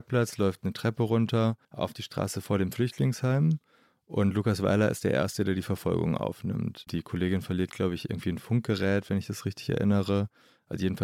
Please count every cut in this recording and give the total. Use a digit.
1